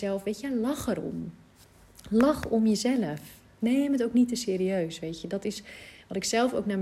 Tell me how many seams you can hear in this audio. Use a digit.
0